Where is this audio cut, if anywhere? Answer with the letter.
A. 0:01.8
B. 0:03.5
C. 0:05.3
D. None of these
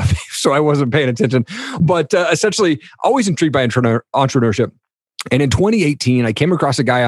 D